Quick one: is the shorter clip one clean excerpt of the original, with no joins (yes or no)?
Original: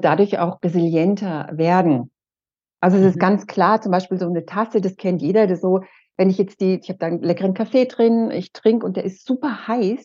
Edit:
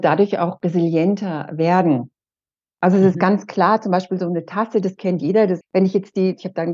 no